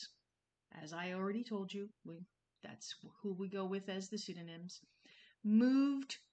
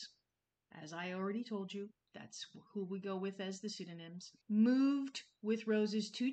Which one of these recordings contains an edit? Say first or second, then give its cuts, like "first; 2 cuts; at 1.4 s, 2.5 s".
second; 2 cuts; at 2.0 s, 4.4 s